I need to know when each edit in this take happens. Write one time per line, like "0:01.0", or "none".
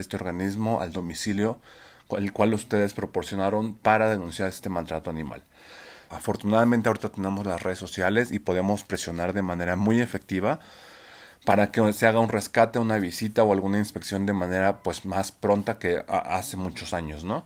0:06.1